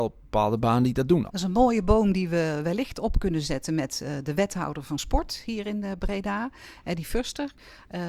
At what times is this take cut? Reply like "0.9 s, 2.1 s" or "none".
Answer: 1.3 s